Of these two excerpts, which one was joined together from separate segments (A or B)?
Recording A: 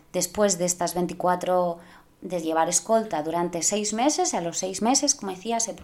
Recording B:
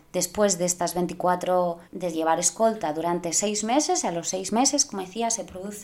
B